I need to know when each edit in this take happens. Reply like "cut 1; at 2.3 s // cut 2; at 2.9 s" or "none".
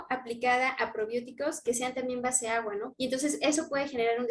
cut 1; at 2.9 s